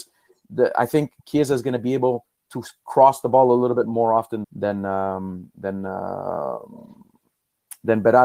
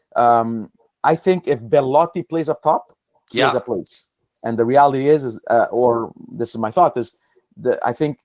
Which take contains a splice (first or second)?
first